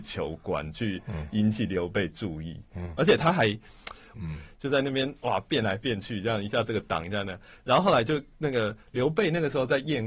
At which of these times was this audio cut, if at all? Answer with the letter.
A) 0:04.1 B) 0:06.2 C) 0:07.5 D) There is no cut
A